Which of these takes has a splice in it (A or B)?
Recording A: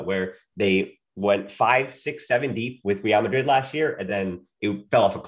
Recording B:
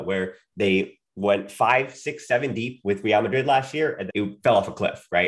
B